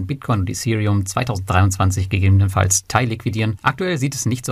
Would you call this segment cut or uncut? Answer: cut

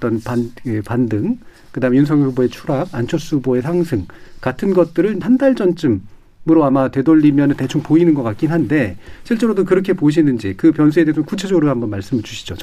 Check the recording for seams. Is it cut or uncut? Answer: cut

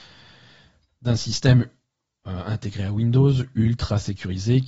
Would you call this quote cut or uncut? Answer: uncut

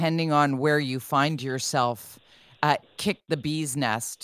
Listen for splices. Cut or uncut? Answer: cut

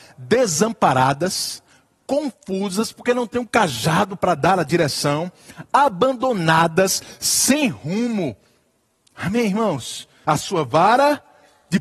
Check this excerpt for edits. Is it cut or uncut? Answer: cut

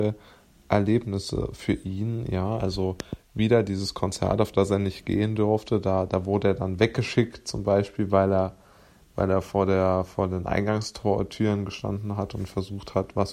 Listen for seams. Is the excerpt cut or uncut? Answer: uncut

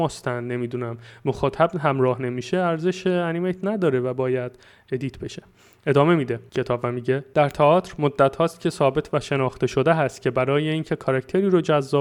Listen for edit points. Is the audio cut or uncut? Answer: uncut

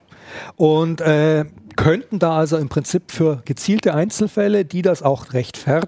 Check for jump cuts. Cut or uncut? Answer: uncut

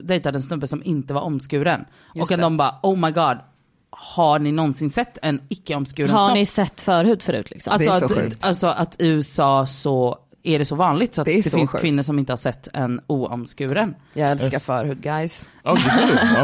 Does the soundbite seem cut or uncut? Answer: uncut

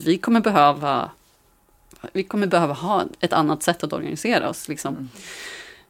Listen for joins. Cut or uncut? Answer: uncut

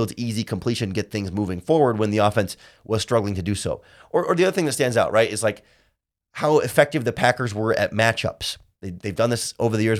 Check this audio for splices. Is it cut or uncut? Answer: uncut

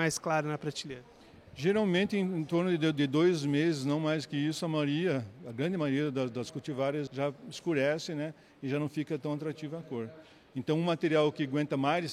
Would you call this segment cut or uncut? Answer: cut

